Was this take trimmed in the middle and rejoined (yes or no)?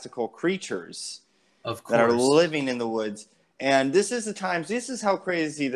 no